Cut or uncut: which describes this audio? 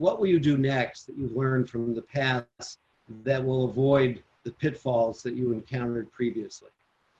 uncut